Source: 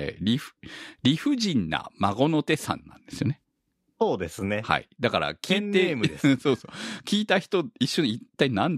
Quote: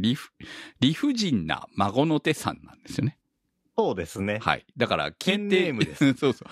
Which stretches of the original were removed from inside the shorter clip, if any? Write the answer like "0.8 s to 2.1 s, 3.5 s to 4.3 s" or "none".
none